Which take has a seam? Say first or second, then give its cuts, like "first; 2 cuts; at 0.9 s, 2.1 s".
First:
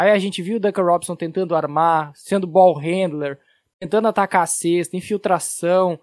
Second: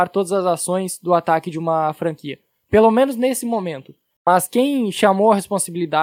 second; 1 cut; at 4.1 s